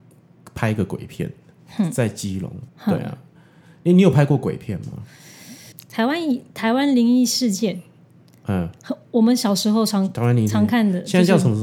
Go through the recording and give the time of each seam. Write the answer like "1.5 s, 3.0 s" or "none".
2.7 s, 5.7 s